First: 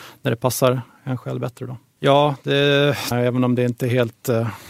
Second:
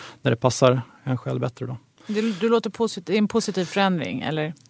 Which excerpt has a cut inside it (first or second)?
first